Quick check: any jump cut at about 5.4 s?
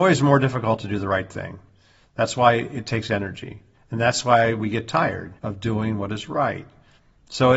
yes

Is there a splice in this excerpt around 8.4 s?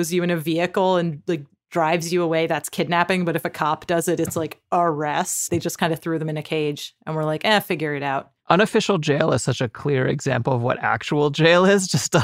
yes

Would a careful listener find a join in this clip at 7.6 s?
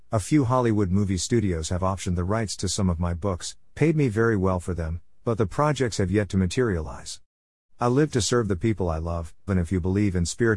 yes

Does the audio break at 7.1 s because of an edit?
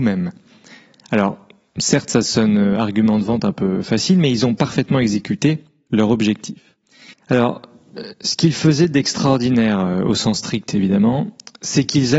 yes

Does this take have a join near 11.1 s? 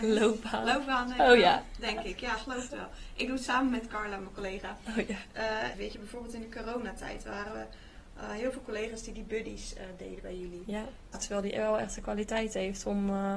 yes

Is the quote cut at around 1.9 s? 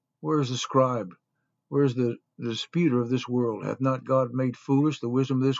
no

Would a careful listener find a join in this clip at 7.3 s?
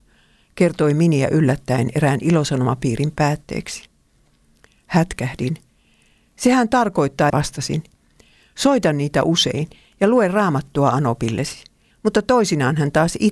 yes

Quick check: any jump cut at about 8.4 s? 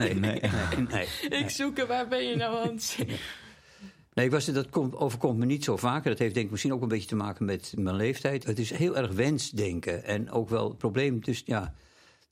yes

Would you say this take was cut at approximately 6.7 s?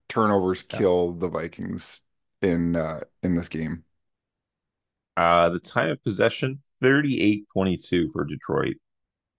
yes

